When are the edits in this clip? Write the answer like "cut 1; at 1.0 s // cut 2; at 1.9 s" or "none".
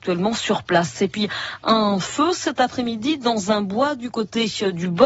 none